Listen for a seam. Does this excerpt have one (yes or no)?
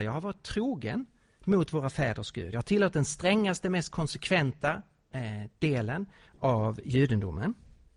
no